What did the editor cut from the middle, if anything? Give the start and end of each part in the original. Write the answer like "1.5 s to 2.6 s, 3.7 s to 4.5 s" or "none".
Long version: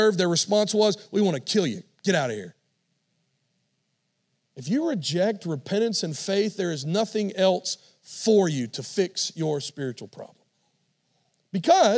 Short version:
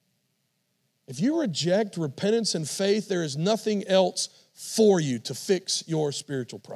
none